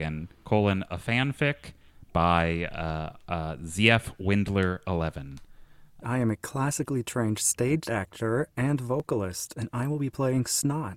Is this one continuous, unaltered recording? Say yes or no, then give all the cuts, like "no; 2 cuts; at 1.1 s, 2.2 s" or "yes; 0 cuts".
no; 1 cut; at 6.0 s